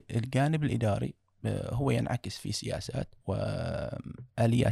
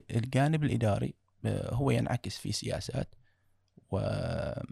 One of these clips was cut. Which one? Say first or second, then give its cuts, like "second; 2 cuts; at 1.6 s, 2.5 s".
first; 1 cut; at 3.2 s